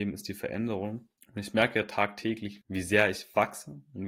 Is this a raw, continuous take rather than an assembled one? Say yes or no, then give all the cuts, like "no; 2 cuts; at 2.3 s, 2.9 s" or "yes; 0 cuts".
no; 2 cuts; at 1.2 s, 2.6 s